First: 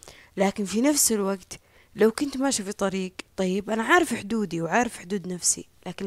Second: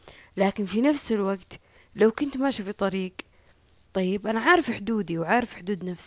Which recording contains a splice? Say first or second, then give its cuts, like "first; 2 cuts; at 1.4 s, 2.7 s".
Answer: first; 1 cut; at 3.3 s